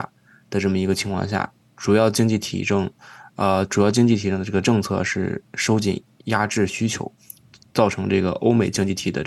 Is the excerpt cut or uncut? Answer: uncut